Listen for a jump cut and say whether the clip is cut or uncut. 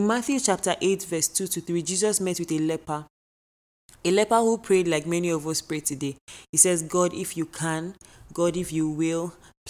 uncut